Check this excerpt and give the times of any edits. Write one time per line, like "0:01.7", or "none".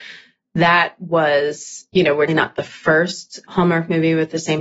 0:02.3
0:03.5